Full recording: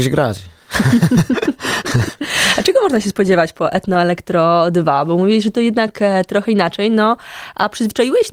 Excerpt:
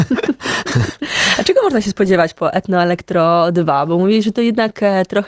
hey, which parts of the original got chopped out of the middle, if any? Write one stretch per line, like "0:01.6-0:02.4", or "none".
none